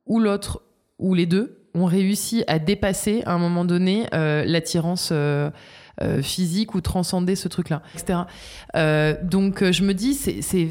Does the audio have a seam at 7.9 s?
yes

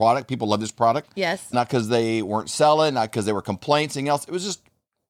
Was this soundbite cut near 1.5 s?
yes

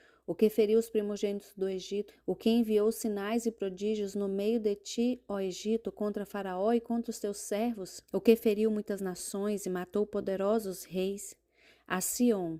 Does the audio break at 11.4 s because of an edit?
no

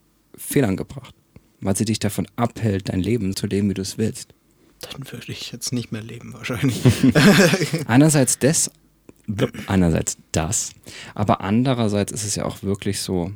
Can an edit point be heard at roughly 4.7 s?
yes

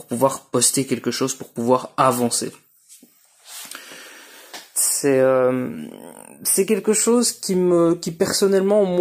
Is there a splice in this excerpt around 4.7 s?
yes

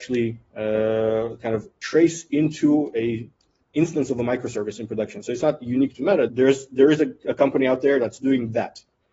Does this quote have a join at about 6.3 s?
yes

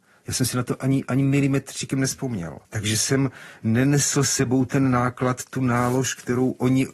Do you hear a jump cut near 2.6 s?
yes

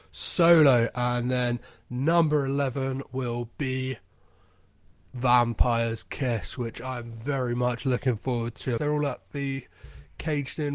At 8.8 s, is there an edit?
yes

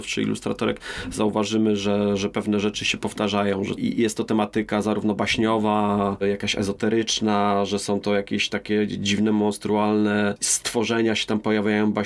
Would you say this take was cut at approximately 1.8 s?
no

